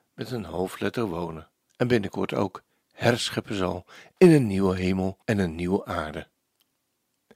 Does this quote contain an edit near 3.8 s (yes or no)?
no